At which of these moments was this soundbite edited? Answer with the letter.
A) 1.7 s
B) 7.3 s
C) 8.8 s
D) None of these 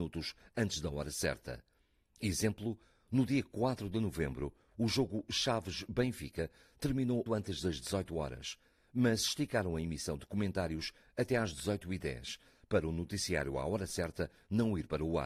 B